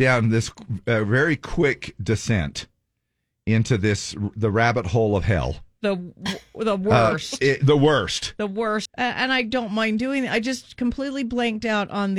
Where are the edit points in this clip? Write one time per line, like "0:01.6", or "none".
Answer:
0:08.9